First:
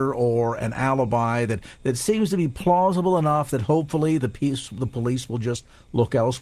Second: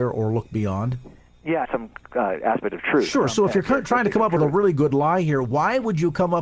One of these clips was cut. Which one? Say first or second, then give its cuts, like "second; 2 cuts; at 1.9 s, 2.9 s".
second; 1 cut; at 1.6 s